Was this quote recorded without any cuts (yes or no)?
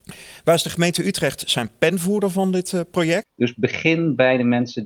no